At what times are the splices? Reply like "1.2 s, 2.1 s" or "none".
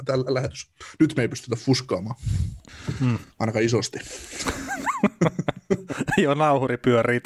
none